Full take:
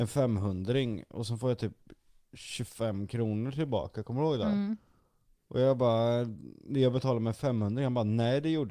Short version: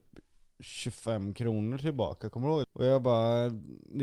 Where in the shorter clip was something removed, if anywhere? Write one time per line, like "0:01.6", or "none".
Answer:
0:02.6